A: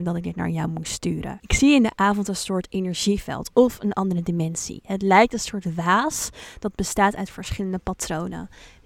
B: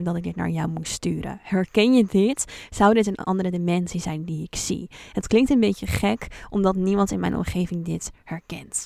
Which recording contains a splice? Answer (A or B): A